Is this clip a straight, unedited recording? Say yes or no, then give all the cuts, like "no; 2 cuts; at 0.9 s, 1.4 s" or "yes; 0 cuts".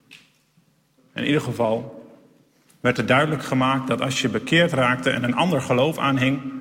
no; 1 cut; at 1.0 s